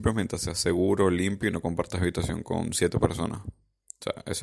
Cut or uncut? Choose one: uncut